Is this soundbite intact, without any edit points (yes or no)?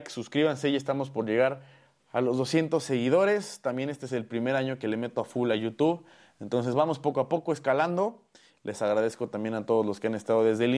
yes